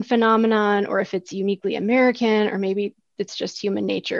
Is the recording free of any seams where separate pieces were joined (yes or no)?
yes